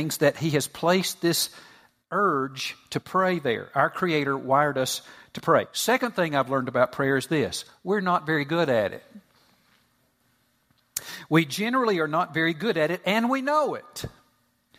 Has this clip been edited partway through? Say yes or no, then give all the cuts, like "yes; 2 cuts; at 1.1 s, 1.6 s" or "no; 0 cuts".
no; 0 cuts